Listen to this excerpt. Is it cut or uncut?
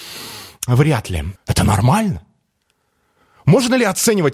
cut